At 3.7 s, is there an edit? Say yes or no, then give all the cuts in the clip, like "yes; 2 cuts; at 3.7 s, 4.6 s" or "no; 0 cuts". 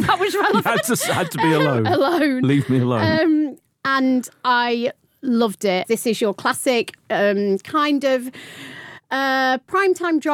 no; 1 cut; at 5.8 s